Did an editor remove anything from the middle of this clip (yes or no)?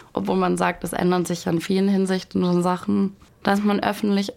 no